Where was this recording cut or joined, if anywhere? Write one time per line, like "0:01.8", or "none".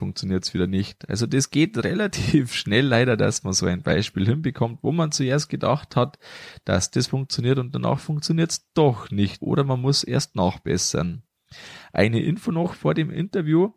0:09.4